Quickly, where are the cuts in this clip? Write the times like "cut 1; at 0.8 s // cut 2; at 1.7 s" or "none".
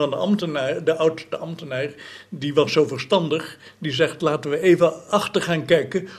none